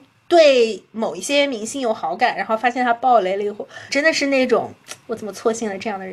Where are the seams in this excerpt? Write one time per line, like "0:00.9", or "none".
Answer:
0:03.9
0:05.0

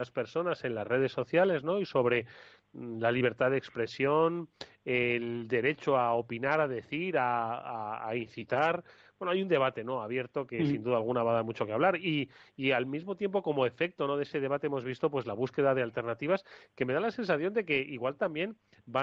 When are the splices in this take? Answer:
none

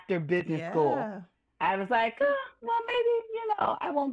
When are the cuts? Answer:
none

